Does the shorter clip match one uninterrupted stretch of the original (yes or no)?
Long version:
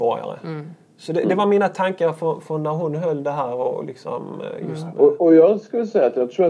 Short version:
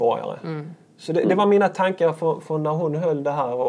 yes